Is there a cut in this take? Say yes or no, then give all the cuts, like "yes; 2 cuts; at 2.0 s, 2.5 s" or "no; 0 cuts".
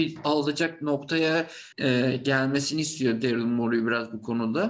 yes; 1 cut; at 1.7 s